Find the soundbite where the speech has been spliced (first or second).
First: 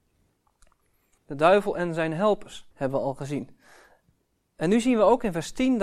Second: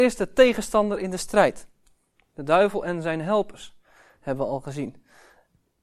first